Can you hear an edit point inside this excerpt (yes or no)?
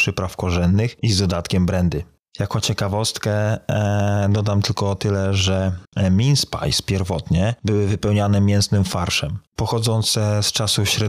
yes